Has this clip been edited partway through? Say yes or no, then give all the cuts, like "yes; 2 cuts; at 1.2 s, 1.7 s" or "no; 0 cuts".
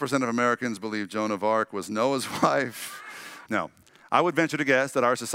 yes; 1 cut; at 3.5 s